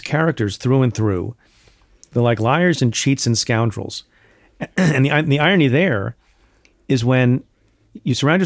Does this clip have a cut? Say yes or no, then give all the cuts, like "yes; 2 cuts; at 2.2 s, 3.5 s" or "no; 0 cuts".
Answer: no; 0 cuts